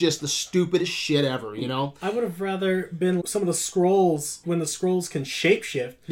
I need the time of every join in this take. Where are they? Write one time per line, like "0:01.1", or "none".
0:03.2
0:04.4